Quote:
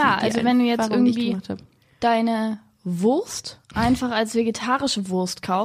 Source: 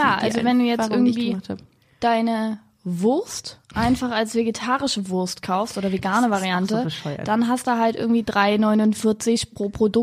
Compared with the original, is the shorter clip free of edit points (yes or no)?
yes